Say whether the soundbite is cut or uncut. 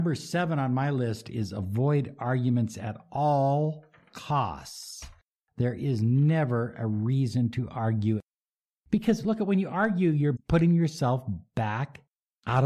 cut